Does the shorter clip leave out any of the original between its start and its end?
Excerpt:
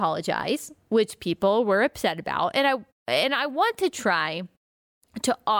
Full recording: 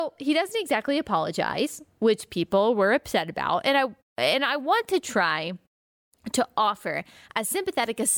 no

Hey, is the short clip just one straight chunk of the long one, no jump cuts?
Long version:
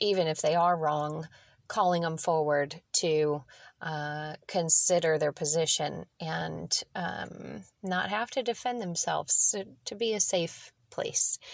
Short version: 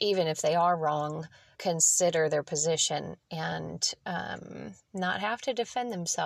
no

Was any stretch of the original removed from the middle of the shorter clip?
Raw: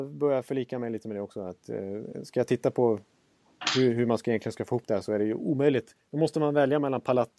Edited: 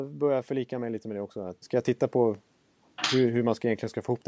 yes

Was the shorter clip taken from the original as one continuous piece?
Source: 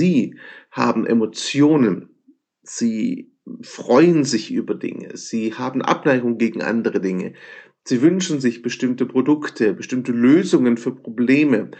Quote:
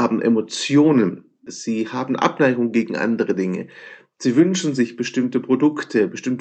no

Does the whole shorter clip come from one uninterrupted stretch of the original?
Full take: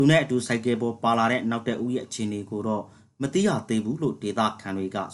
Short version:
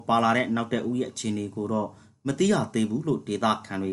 yes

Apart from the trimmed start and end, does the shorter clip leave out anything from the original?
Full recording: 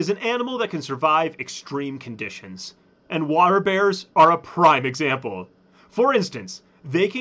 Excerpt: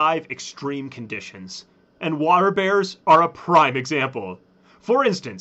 no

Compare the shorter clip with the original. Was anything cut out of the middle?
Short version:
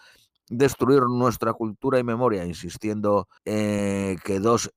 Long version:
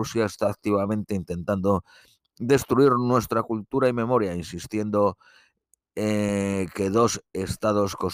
yes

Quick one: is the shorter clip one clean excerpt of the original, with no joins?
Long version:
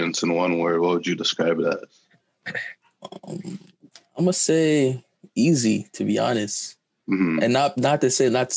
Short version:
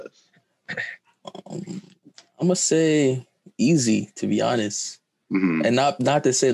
yes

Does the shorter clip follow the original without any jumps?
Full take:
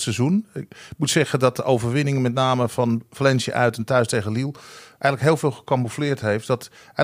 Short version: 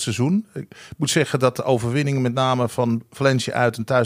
yes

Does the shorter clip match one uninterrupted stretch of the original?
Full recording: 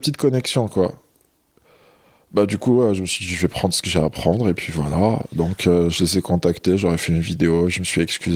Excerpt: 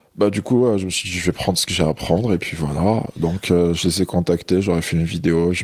yes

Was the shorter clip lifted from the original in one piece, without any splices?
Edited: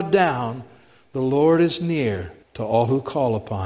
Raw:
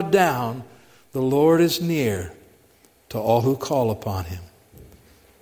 no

